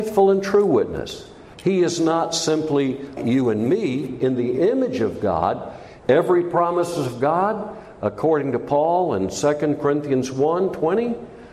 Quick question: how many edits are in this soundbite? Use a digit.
3